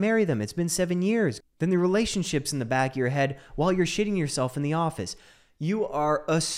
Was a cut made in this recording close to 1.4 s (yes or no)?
yes